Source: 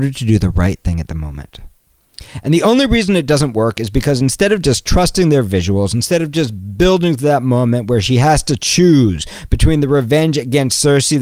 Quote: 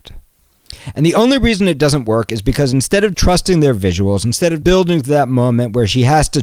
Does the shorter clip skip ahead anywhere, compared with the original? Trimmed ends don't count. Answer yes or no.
yes